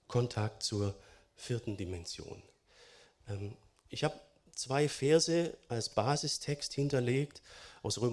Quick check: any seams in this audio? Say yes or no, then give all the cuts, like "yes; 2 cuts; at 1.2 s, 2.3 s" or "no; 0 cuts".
no; 0 cuts